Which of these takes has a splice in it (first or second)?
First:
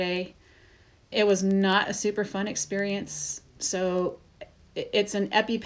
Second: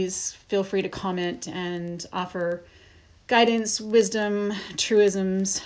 first